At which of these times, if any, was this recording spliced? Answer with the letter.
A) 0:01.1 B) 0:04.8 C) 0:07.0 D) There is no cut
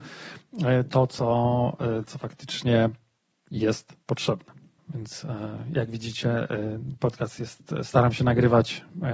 B